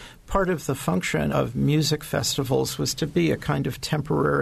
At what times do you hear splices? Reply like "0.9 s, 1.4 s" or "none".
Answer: 1.3 s